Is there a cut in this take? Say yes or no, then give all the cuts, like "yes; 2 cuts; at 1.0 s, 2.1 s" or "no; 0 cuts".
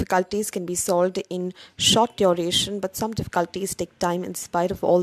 no; 0 cuts